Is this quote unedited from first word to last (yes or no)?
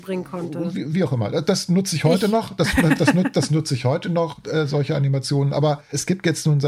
yes